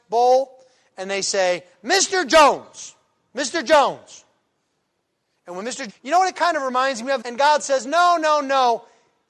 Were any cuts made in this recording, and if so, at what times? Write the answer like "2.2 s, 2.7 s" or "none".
5.9 s, 7.2 s